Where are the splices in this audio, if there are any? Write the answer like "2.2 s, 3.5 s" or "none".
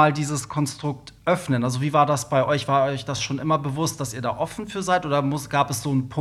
none